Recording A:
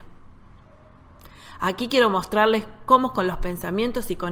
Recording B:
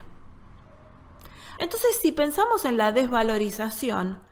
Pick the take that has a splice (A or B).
B